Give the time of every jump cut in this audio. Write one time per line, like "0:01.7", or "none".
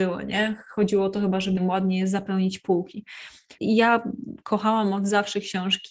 0:01.6
0:03.6